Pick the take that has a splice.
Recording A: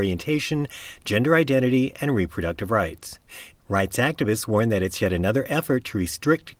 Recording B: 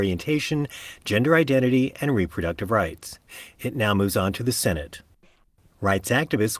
A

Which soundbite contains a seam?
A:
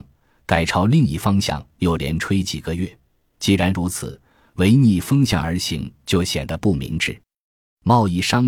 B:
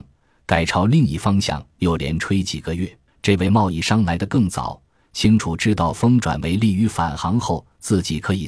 B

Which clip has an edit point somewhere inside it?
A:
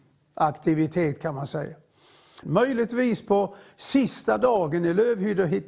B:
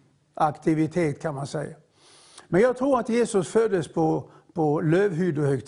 A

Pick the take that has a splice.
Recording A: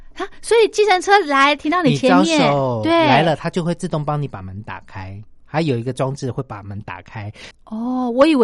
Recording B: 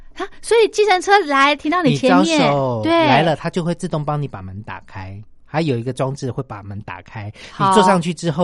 A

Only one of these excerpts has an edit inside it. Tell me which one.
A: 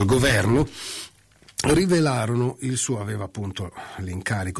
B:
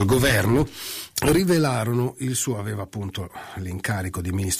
B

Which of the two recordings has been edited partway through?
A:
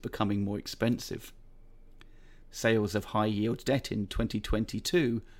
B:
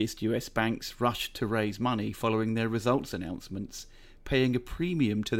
A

